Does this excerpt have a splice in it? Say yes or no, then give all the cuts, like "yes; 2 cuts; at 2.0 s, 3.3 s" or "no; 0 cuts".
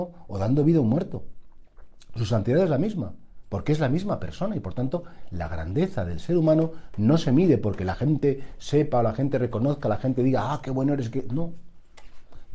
no; 0 cuts